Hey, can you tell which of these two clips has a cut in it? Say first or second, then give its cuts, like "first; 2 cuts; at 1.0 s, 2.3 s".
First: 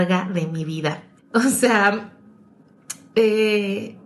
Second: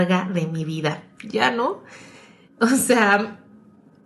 first; 1 cut; at 1.2 s